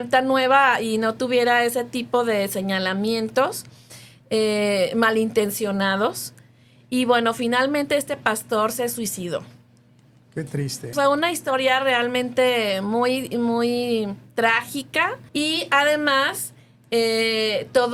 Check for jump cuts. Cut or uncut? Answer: cut